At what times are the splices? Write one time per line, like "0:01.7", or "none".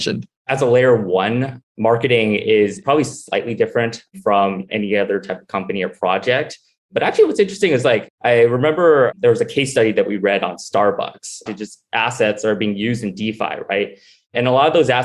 0:11.5